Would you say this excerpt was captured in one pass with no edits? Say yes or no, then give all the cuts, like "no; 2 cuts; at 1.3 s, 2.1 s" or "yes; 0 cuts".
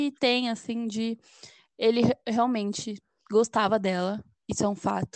yes; 0 cuts